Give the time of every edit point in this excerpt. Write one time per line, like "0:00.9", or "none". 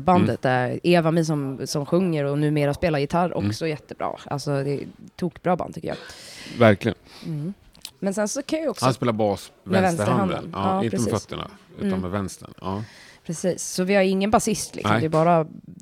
0:07.9
0:09.5